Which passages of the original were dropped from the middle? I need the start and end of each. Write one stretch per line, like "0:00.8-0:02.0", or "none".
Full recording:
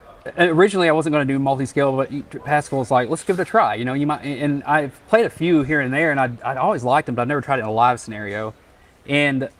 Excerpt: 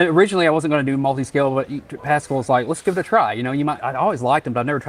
0:04.2-0:06.4